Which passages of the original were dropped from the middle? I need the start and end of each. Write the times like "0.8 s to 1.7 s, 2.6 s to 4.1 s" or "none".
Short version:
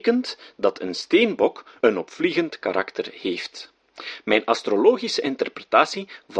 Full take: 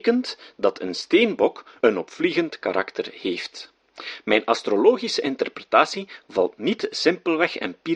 none